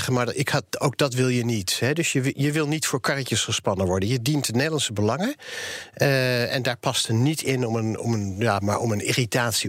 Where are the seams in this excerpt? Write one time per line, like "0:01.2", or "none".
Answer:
0:08.6